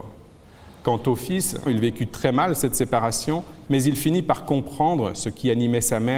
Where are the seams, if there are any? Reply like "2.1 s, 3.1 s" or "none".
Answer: 1.7 s, 3.6 s